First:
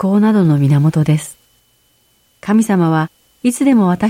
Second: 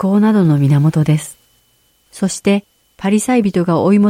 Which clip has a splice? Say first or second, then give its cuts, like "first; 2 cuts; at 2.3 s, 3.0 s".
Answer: second; 1 cut; at 1.9 s